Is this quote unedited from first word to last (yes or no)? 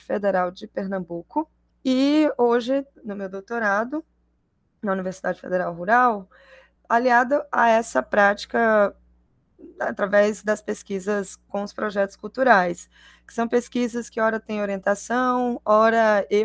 yes